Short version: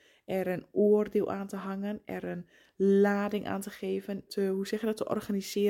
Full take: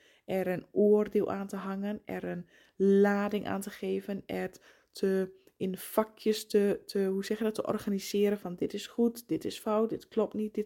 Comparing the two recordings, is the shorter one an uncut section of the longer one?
no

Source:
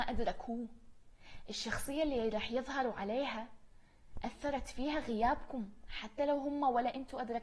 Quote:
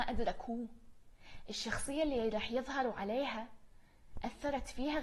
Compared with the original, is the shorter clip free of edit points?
yes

